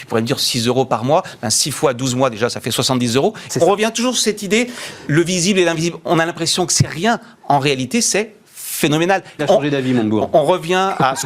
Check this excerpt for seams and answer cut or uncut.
cut